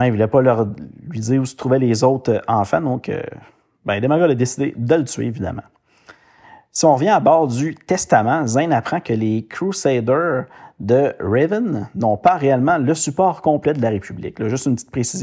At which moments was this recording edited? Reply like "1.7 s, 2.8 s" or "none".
none